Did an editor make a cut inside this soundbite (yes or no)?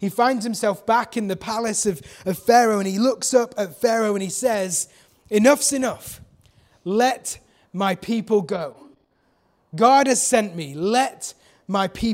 no